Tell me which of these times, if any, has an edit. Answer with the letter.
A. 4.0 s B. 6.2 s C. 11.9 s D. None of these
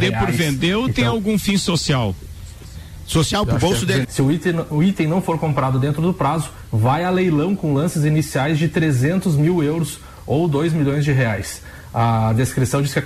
A